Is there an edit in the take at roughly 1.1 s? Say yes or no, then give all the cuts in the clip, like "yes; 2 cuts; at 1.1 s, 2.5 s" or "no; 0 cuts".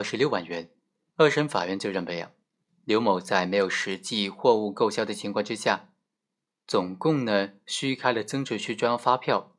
yes; 1 cut; at 1.1 s